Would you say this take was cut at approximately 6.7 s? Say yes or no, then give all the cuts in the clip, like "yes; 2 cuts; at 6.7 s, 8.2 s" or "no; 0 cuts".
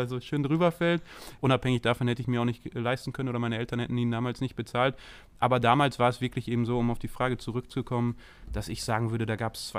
no; 1 cut; at 1.4 s